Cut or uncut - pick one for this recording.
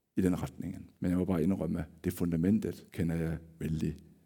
cut